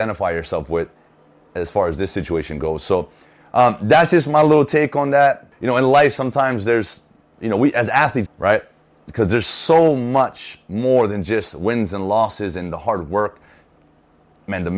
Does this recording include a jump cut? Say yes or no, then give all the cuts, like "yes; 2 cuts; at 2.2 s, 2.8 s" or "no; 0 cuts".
yes; 2 cuts; at 5.5 s, 8.3 s